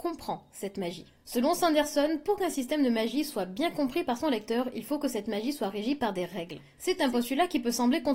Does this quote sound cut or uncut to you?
uncut